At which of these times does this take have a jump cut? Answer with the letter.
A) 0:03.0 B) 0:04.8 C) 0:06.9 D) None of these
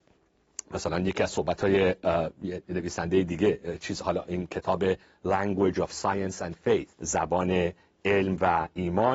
C